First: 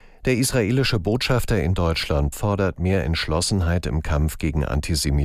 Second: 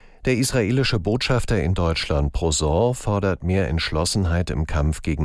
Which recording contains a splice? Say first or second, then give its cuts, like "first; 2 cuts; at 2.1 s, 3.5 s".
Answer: first; 1 cut; at 2.3 s